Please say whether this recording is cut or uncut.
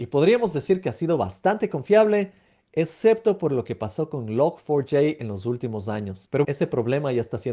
cut